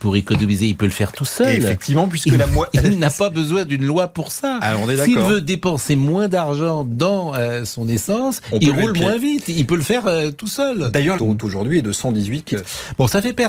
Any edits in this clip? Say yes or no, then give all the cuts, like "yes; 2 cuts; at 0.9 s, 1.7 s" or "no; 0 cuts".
yes; 2 cuts; at 11.2 s, 12.5 s